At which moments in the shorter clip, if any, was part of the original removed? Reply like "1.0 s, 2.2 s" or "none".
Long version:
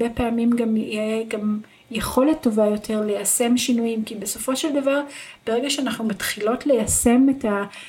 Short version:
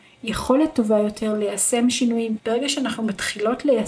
2.4 s

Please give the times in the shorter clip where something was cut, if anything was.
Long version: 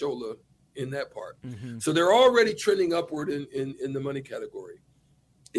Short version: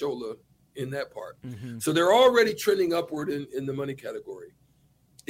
3.5 s

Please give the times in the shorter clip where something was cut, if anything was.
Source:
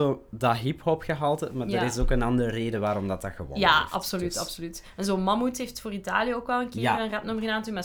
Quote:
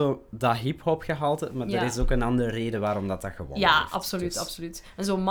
none

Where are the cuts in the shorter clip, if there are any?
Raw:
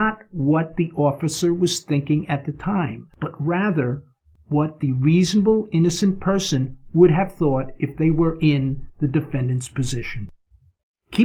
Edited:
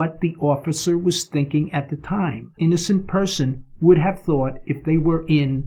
2.6 s

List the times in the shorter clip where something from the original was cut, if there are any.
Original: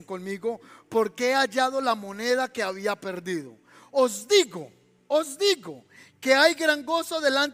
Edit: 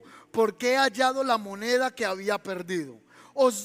none

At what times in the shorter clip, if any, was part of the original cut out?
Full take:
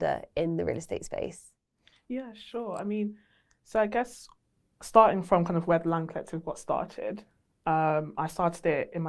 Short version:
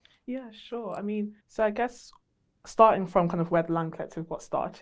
1.4 s

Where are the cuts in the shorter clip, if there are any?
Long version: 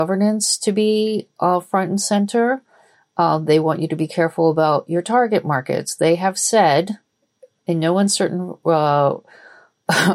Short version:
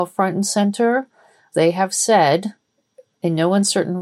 1.5 s

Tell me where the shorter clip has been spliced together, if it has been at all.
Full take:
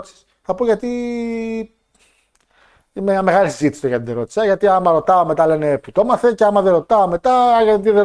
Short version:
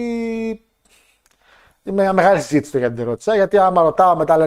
none

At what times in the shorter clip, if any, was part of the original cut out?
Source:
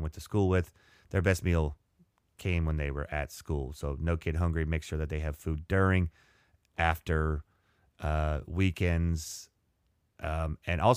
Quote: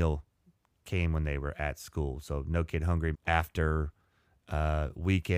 3.1 s

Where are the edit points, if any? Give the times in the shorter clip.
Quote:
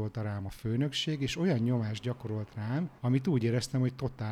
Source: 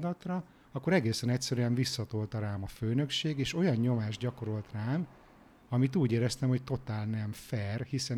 3.0 s

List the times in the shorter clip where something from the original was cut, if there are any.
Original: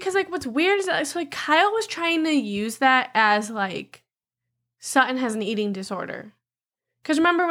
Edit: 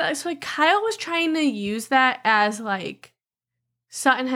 none

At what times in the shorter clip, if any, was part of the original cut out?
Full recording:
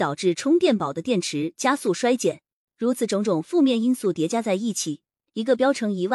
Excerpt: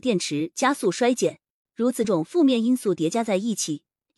2.0 s

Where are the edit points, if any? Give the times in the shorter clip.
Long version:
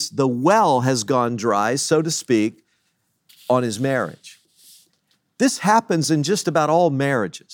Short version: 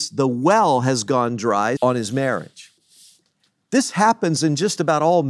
1.8 s

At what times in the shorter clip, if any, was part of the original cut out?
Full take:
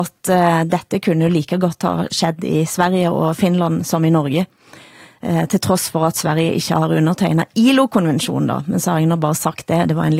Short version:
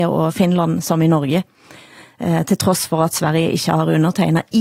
none

